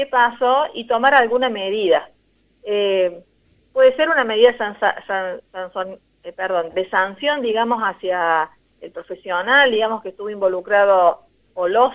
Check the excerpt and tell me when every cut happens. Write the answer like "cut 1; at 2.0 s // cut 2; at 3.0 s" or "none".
cut 1; at 6.7 s // cut 2; at 8.8 s

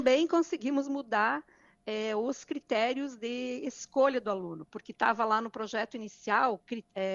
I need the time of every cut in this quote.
none

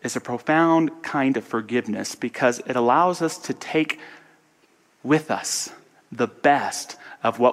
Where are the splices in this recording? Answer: none

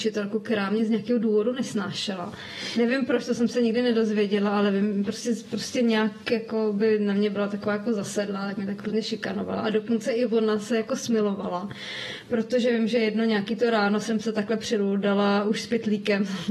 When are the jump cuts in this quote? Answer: none

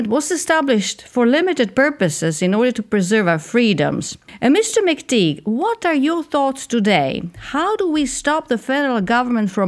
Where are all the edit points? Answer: none

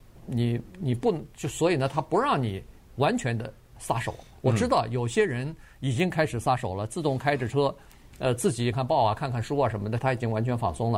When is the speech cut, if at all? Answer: cut 1; at 8.7 s // cut 2; at 10.0 s

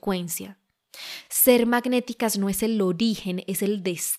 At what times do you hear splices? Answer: none

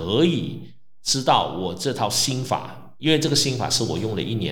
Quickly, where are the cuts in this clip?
cut 1; at 3.0 s

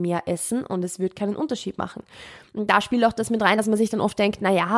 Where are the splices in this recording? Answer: none

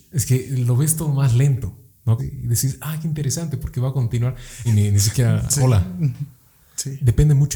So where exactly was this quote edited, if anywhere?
cut 1; at 2.2 s // cut 2; at 4.6 s

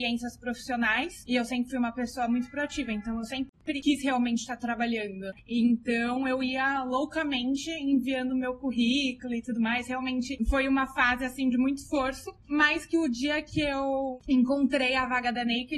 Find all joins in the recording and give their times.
none

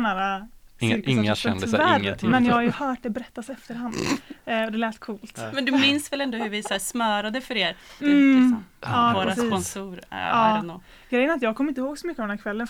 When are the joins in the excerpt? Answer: cut 1; at 8.0 s

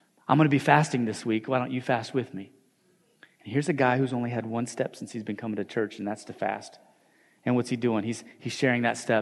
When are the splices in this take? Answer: none

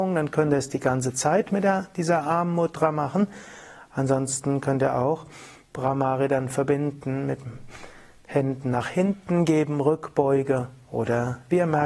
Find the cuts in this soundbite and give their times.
none

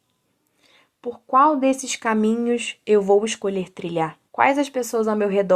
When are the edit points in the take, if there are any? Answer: cut 1; at 4.3 s

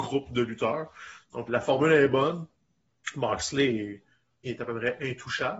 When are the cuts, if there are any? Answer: cut 1; at 1.5 s // cut 2; at 4.5 s

